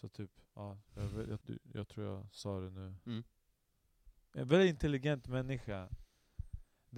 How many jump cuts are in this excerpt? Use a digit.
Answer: 1